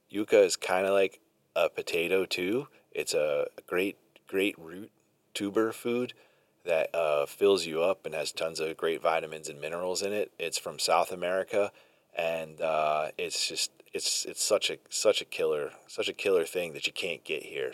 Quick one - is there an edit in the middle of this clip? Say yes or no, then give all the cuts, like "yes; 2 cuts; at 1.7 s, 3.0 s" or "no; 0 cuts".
no; 0 cuts